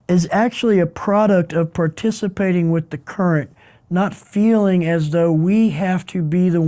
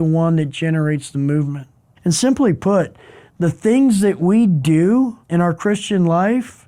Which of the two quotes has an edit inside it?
second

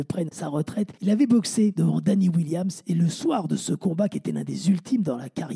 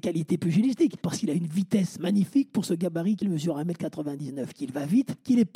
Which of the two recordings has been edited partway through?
second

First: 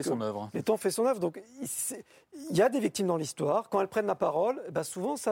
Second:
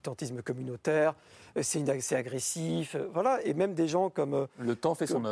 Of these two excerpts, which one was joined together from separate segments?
second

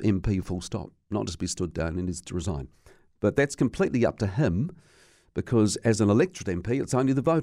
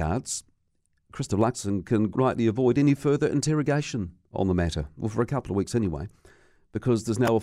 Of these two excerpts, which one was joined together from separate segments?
second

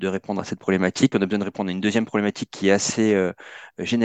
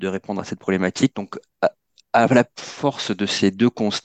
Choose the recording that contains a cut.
second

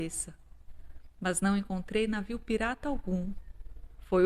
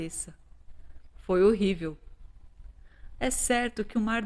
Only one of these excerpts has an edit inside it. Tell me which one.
second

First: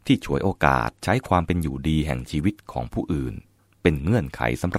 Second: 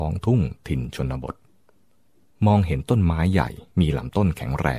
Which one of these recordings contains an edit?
second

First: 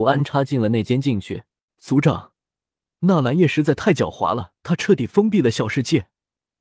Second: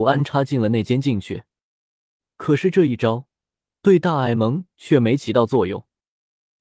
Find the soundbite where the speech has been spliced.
first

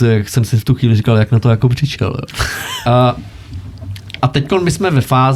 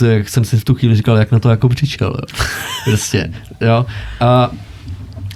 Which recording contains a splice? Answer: first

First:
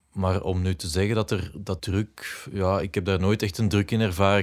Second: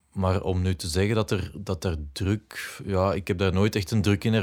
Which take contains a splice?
first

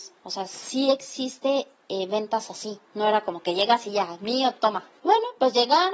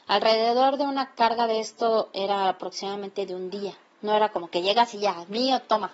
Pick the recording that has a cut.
first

